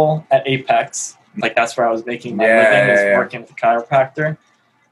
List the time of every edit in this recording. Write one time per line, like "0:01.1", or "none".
0:01.4